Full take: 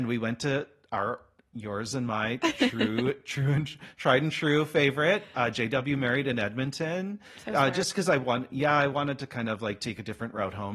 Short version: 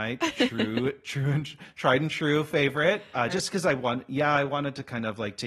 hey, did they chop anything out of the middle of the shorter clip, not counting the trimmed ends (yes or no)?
yes